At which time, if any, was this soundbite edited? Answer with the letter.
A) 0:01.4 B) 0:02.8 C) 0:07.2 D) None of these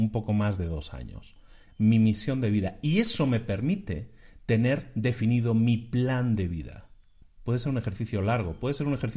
C